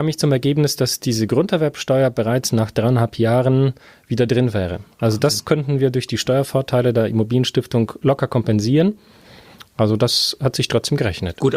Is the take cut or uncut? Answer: uncut